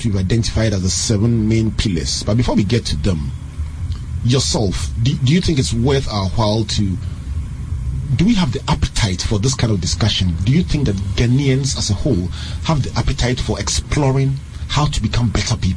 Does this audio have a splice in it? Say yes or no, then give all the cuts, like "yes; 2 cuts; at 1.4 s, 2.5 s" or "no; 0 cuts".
no; 0 cuts